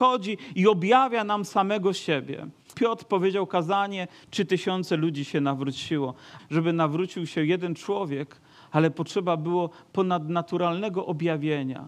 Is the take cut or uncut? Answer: cut